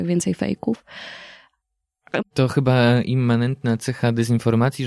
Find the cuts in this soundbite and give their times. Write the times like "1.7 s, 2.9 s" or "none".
2.2 s